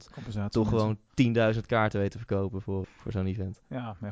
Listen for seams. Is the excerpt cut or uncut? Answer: cut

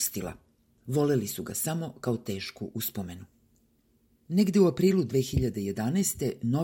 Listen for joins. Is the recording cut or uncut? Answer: uncut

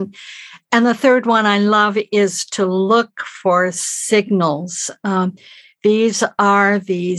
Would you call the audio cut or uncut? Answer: uncut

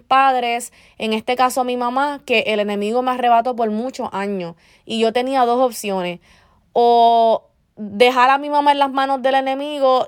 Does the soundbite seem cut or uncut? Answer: uncut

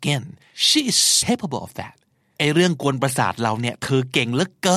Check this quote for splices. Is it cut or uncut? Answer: cut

